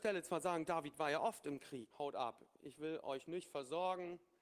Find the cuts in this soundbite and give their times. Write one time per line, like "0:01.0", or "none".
0:01.9